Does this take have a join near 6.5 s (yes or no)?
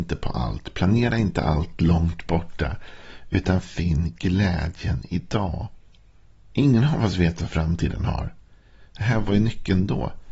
yes